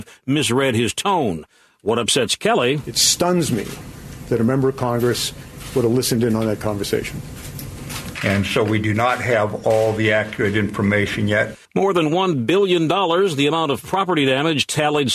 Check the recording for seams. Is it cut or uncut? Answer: cut